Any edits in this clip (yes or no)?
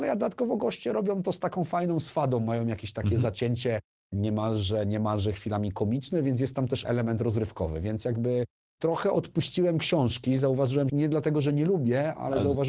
yes